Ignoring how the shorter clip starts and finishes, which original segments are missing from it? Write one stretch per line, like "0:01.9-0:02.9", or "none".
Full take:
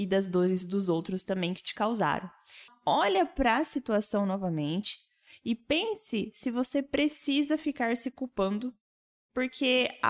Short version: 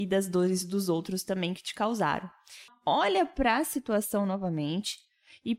none